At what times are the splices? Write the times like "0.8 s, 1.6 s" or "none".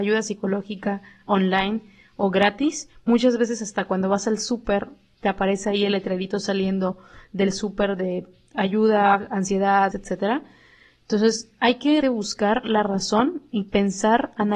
9.9 s, 12.0 s